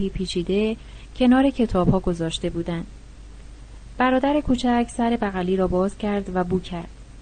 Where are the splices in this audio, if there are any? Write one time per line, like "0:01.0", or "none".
none